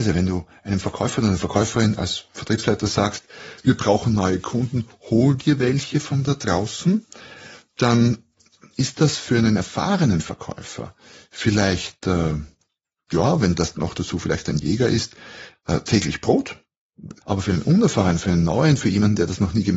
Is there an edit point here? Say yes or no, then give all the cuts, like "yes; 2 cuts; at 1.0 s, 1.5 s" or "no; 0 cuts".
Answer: yes; 1 cut; at 17.2 s